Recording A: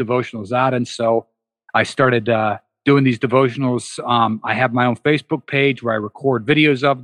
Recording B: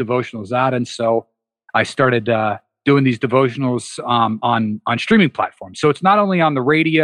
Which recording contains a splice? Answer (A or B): A